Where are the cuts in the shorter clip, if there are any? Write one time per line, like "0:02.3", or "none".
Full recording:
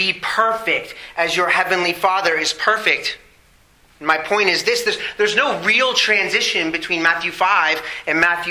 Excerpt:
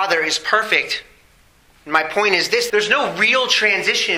0:02.7